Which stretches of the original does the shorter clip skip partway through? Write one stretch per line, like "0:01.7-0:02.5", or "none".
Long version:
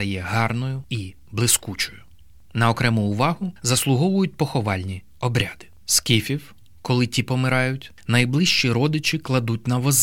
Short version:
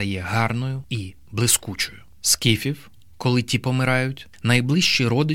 0:02.1-0:05.7